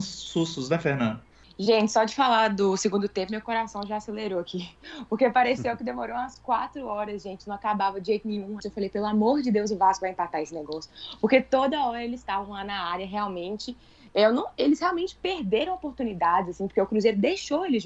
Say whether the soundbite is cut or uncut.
cut